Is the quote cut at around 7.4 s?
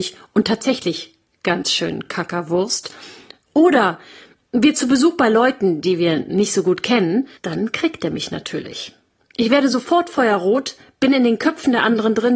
yes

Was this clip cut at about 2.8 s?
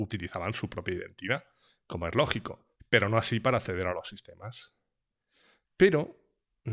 yes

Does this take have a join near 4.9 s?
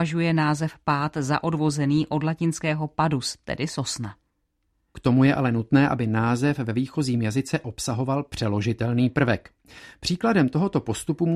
yes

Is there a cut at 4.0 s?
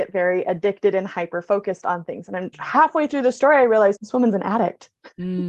yes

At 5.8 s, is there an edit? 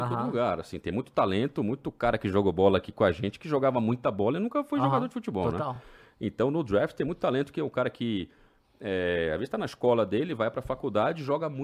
no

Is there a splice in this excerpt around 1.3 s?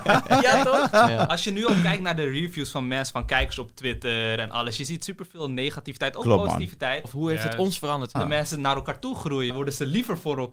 no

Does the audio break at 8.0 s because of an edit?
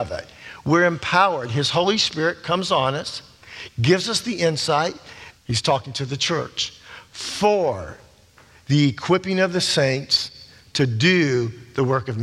no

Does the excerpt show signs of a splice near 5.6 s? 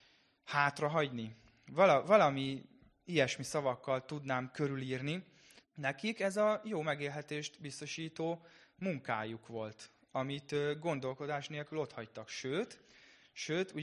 yes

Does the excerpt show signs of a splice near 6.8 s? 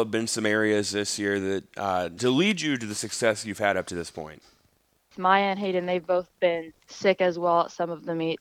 yes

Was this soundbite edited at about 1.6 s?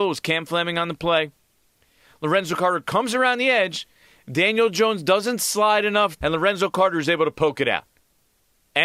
no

